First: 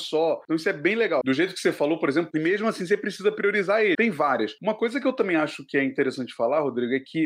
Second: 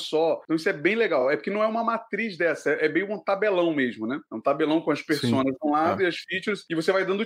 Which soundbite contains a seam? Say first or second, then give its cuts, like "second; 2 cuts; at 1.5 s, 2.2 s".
first; 3 cuts; at 1.2 s, 2.3 s, 3.9 s